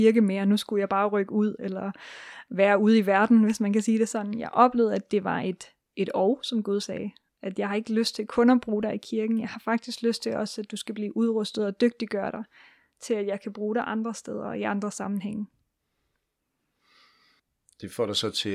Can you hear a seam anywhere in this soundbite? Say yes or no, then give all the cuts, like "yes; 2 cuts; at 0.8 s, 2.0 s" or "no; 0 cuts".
no; 0 cuts